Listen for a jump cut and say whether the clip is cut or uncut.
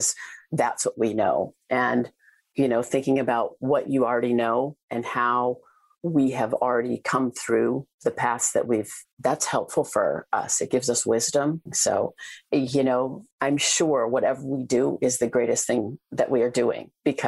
cut